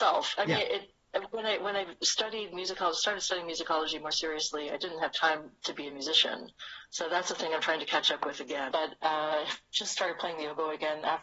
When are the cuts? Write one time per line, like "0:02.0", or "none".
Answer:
0:08.7